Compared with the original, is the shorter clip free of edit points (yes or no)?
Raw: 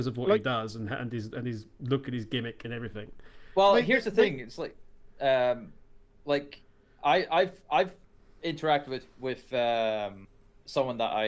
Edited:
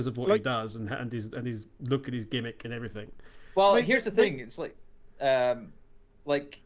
yes